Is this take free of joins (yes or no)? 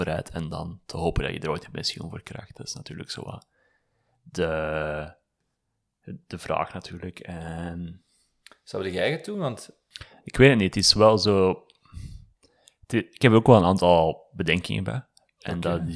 yes